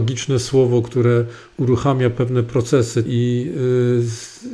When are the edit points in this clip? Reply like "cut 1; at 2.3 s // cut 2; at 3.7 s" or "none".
cut 1; at 3.1 s